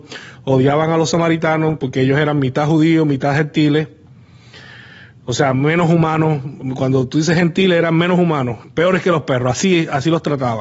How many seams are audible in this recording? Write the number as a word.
zero